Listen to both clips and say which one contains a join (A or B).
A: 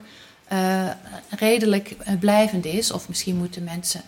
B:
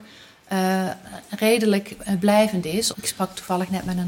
B